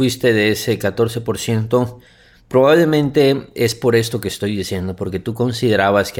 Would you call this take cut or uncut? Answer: uncut